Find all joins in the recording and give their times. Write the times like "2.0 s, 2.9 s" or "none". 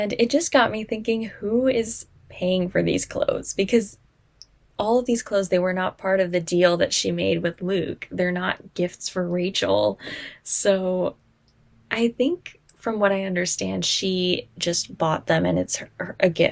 none